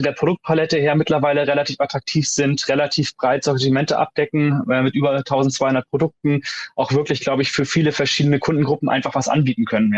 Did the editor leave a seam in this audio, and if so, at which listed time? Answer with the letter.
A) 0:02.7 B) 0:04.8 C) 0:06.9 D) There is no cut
D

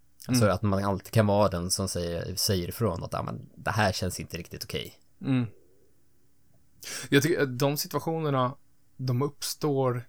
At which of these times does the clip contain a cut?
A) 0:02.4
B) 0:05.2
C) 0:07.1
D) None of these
D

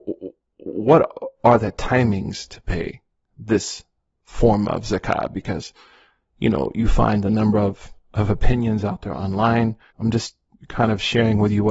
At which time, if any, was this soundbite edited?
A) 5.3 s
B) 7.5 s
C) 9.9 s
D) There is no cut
C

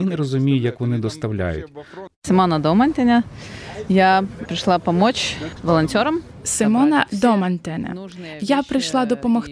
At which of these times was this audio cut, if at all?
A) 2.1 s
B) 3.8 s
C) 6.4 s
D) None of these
A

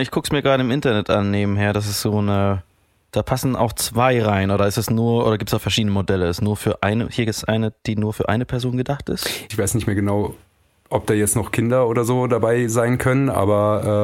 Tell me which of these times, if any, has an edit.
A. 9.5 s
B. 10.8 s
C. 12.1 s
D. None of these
A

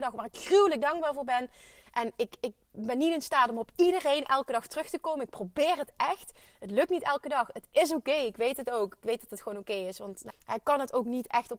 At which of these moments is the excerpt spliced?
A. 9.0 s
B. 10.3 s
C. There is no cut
B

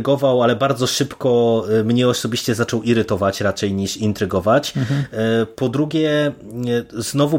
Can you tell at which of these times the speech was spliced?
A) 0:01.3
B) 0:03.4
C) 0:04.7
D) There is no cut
D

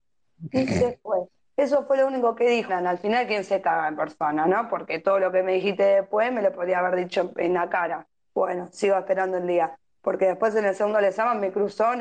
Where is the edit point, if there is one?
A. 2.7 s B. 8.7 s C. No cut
A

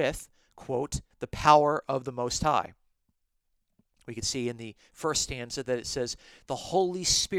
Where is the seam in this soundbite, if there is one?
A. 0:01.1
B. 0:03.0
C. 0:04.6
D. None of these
A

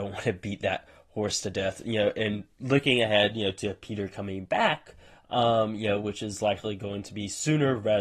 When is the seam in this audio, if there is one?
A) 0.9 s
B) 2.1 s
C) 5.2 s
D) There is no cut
D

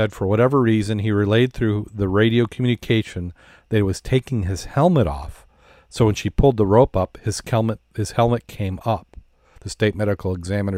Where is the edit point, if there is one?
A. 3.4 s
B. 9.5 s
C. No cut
B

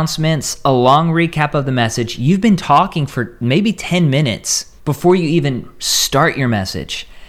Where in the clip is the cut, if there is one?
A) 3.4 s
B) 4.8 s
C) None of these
B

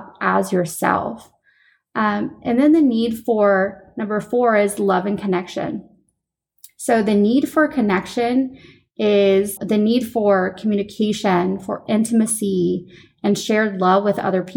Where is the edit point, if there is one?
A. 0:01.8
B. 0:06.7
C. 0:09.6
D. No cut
C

